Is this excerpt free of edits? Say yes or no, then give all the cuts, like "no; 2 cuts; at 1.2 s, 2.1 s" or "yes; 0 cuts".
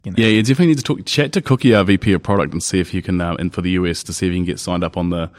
yes; 0 cuts